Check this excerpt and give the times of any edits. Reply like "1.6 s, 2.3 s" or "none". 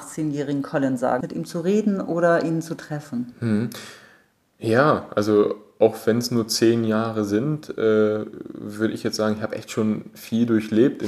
1.2 s